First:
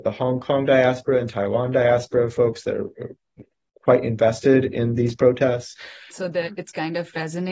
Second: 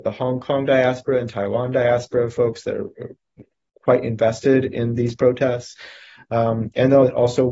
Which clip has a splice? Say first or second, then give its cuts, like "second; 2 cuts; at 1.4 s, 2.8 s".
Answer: first; 1 cut; at 6.1 s